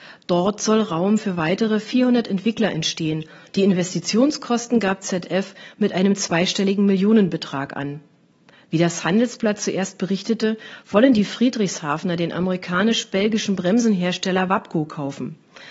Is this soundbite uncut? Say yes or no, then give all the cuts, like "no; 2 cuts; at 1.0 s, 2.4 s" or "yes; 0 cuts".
no; 1 cut; at 8.5 s